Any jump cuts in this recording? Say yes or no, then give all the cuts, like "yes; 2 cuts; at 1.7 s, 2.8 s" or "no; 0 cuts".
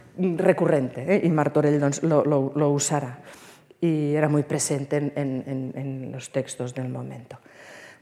no; 0 cuts